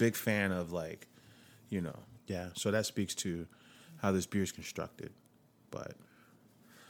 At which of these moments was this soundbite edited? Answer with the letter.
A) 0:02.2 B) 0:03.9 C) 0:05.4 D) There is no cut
A